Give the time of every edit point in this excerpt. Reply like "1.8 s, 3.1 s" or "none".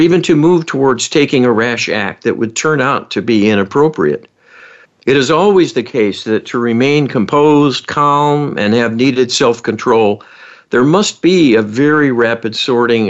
4.9 s